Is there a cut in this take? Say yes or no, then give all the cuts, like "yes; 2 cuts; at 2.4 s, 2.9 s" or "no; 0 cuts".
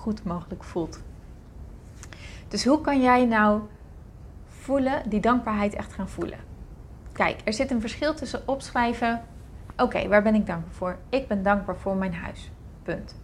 no; 0 cuts